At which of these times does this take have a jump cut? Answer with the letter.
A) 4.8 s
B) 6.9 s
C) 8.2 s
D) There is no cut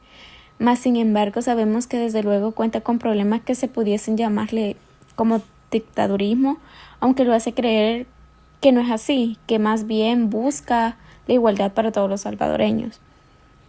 D